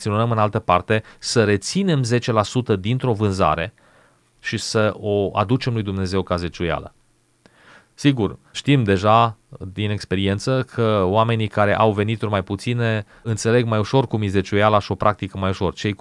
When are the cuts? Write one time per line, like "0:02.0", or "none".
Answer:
none